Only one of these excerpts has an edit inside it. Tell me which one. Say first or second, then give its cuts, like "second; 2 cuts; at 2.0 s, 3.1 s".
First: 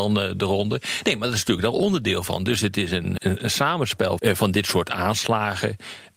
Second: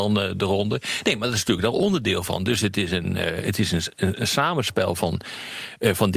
first; 2 cuts; at 3.2 s, 4.2 s